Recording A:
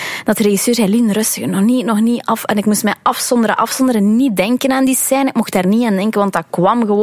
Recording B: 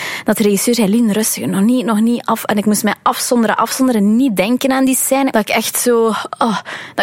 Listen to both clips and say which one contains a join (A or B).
B